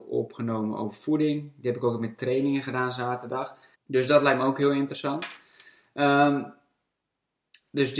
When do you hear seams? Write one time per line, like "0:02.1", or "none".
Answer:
0:03.7